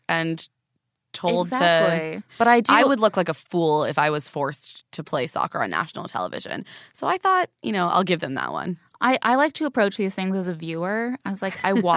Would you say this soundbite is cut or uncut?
cut